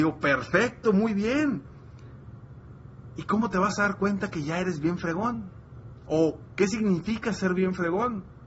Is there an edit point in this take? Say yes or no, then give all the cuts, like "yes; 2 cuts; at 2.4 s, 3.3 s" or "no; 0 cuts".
no; 0 cuts